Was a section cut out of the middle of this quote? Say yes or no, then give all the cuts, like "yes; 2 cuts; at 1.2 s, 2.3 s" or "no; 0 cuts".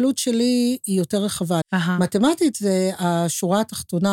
yes; 1 cut; at 1.6 s